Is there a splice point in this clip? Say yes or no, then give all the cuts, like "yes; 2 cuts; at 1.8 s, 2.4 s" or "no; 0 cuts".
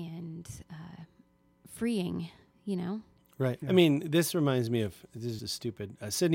yes; 2 cuts; at 3.6 s, 5.4 s